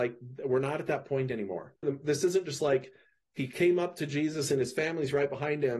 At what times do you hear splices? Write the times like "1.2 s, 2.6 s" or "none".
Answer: 1.8 s